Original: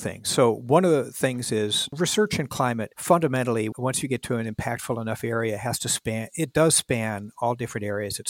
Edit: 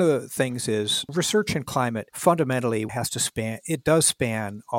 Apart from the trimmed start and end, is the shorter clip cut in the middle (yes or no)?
yes